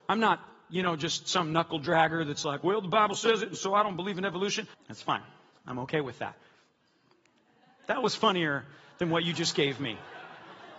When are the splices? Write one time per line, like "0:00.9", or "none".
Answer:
0:04.7